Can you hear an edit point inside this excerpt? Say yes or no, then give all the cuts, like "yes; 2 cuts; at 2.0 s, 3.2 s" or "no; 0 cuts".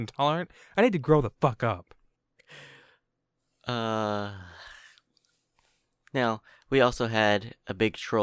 no; 0 cuts